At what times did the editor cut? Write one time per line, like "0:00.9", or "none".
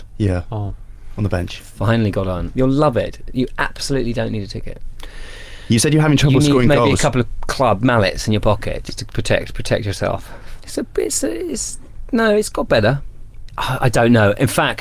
0:02.5
0:10.6